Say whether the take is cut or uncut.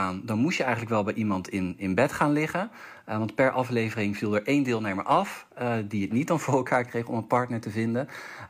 uncut